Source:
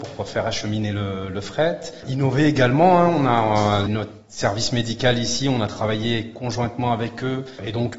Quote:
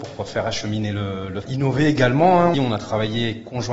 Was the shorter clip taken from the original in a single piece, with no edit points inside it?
no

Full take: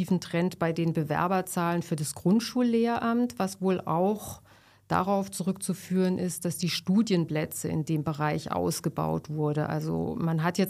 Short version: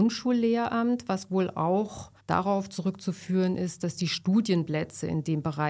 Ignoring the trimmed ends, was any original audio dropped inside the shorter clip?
yes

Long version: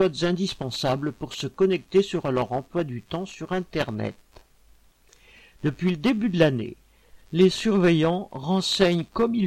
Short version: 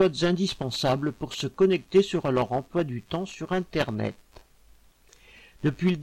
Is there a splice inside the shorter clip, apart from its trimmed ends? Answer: no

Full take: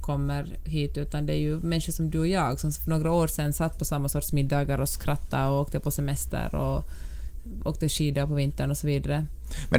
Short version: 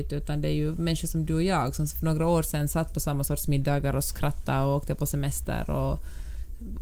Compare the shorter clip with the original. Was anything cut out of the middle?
no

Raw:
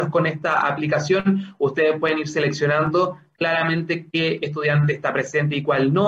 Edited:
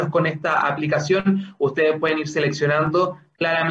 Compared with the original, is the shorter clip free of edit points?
yes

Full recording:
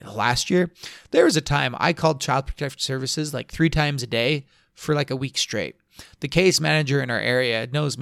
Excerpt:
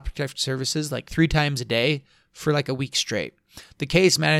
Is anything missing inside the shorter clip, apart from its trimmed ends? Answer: no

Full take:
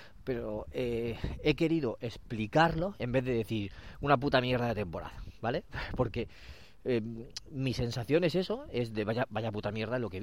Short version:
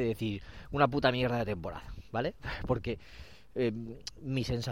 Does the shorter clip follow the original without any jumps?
yes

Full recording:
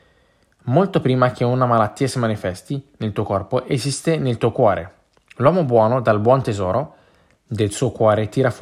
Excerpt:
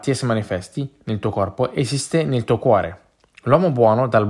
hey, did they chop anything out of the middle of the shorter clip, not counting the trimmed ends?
no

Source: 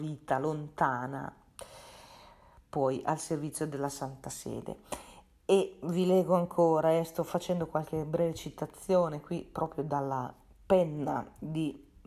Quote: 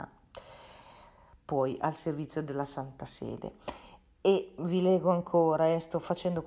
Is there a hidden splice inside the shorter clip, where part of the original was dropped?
no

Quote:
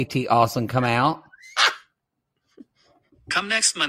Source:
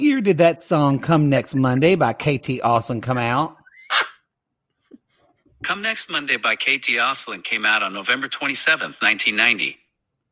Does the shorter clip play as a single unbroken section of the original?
yes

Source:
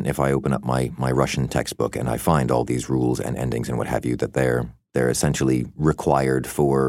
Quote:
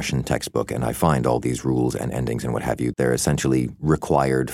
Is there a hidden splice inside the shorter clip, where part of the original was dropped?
yes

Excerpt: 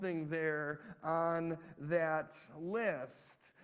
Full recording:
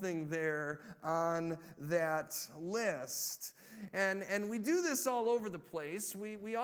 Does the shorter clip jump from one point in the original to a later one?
no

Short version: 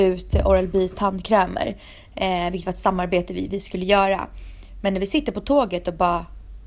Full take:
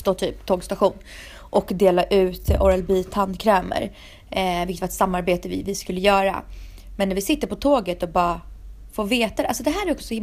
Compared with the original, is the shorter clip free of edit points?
yes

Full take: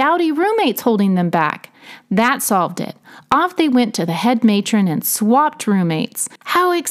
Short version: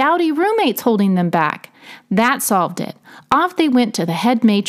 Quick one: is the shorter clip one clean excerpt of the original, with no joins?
yes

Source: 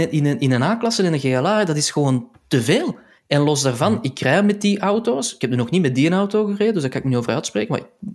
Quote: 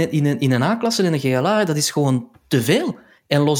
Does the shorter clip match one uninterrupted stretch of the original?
yes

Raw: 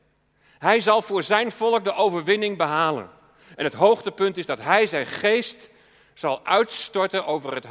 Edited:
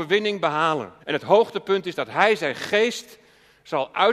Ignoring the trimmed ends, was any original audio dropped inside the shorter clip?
yes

